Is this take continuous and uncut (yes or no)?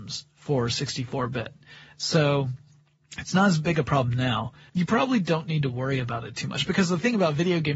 no